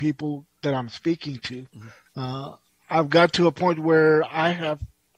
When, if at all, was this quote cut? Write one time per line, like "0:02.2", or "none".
0:02.1